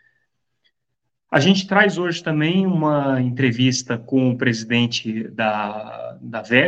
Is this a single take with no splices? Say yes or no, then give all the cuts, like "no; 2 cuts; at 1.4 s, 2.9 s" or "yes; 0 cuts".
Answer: yes; 0 cuts